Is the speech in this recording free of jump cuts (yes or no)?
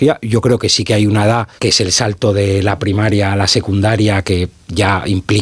no